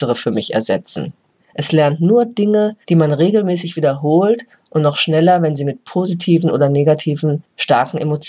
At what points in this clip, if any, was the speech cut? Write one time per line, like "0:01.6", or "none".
0:01.4
0:02.8